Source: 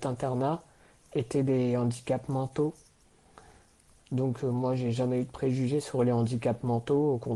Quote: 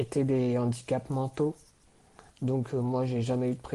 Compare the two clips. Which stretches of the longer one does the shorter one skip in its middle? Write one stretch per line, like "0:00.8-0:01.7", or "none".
0:03.5-0:04.0